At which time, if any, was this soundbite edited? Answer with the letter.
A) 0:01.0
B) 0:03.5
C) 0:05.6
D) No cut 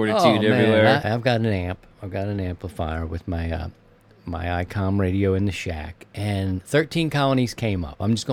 A